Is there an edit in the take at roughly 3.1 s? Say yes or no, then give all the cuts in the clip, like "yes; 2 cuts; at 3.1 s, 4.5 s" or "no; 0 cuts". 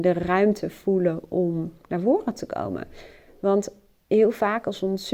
no; 0 cuts